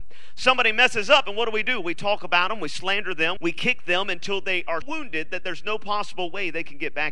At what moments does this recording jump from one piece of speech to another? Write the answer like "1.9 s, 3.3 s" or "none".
3.4 s, 4.8 s

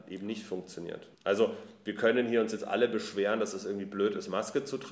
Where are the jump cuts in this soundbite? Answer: 1.1 s

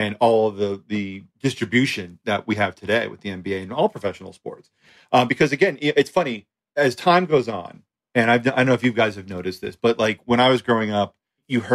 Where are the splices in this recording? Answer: none

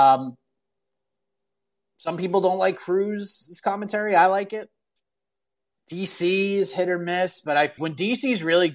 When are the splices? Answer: 5.7 s, 7.8 s

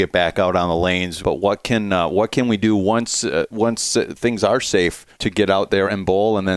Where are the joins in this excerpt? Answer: 1.2 s, 5.1 s

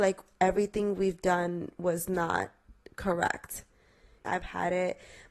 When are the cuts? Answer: 4.2 s

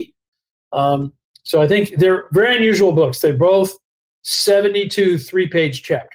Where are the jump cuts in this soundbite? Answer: none

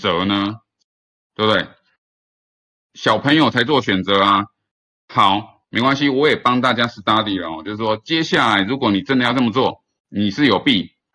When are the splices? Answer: none

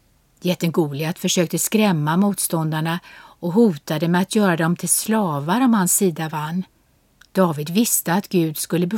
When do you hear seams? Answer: 7.2 s

